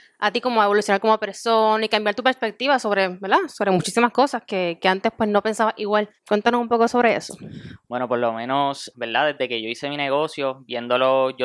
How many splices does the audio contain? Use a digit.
2